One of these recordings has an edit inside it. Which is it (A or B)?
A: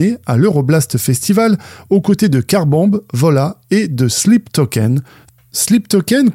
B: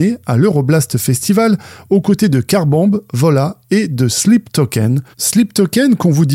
B